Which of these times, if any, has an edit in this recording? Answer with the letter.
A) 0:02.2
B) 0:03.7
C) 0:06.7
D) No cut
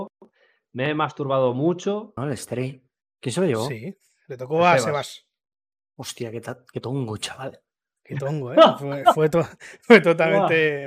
A